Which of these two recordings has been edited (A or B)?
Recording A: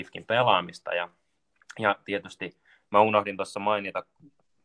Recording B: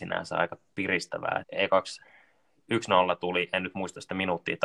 B